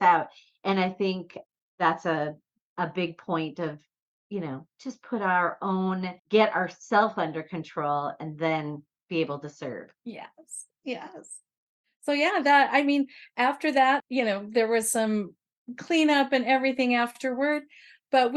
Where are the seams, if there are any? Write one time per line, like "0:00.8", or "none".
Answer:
0:06.2
0:14.0